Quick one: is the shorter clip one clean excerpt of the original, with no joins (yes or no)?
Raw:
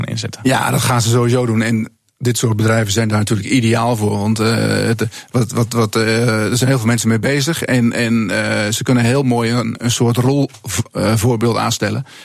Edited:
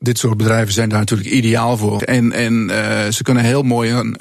no